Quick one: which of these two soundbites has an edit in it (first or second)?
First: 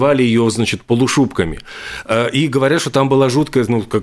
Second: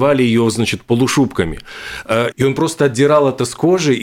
second